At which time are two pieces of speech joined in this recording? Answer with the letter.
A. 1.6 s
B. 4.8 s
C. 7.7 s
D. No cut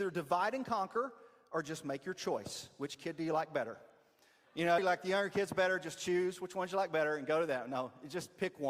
B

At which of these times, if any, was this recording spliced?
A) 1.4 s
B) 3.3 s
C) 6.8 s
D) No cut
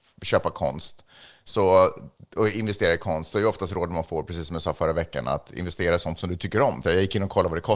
C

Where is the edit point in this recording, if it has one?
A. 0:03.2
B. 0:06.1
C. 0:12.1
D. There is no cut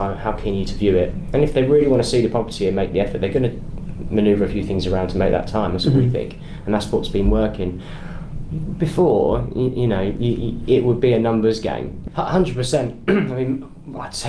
C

